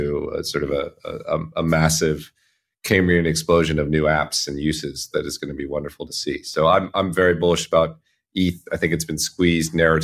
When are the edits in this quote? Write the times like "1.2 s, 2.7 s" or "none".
none